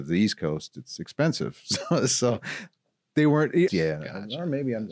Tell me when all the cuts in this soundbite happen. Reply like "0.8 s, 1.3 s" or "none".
3.7 s